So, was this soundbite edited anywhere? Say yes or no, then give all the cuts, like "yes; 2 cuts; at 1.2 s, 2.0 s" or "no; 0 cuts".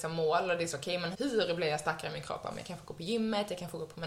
yes; 1 cut; at 1.1 s